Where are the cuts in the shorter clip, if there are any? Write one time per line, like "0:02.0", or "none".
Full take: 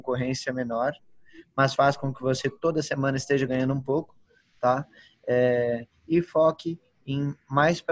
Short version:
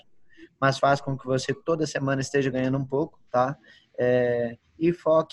0:03.3